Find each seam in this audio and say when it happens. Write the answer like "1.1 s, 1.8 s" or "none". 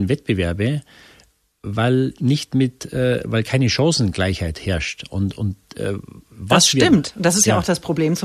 none